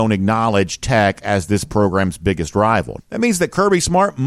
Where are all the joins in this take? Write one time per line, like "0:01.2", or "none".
0:03.0

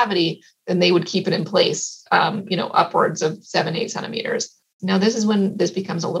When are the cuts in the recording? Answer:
0:04.8

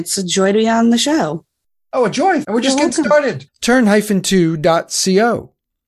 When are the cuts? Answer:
0:02.4
0:03.5

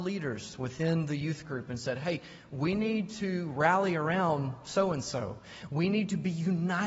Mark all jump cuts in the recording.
none

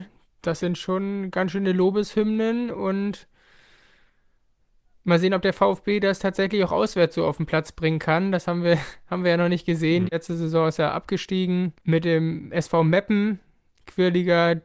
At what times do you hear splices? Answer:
0:10.1
0:11.8

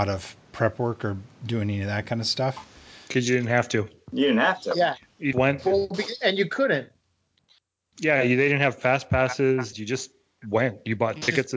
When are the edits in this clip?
0:05.3
0:09.7

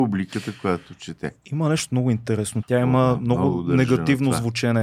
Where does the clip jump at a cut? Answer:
0:02.6

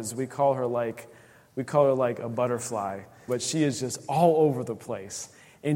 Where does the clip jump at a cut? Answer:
0:03.3

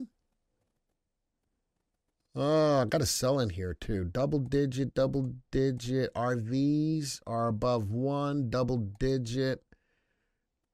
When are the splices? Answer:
none

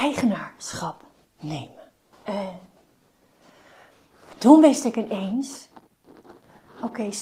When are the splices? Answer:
0:02.1
0:04.3

